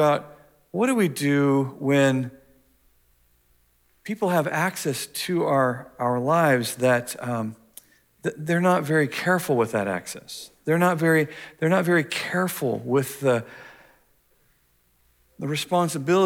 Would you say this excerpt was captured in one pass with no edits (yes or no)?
yes